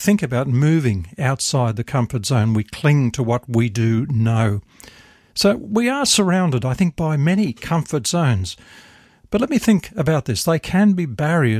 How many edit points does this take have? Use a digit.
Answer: 0